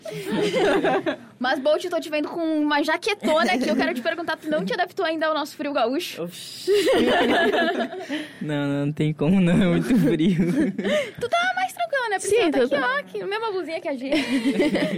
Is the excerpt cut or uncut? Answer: uncut